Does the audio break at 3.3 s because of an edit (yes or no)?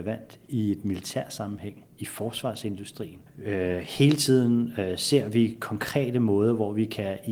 yes